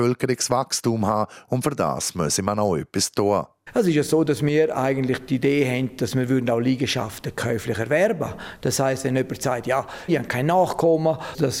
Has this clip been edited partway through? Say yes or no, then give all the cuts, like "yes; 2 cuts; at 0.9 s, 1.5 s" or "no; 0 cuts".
yes; 1 cut; at 10.1 s